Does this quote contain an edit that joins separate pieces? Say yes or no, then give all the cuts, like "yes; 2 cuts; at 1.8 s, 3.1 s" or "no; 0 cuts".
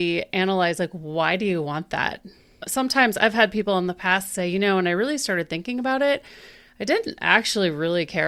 no; 0 cuts